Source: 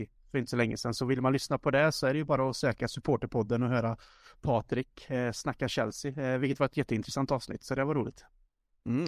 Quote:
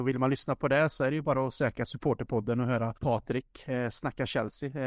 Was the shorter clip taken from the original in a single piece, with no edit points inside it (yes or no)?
no